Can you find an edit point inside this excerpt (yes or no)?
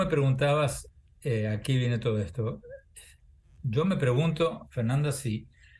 no